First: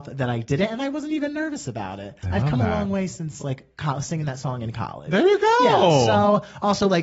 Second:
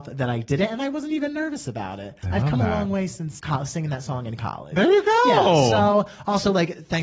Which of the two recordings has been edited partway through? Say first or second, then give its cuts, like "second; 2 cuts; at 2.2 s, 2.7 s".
second; 1 cut; at 3.4 s